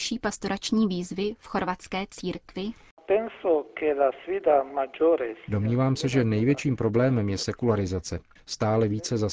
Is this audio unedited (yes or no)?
yes